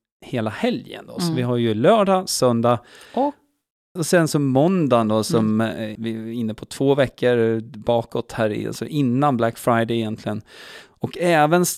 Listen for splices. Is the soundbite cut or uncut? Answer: cut